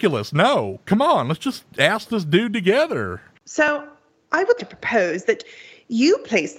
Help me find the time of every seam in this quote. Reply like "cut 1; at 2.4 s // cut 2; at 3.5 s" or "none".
cut 1; at 3.4 s // cut 2; at 4.6 s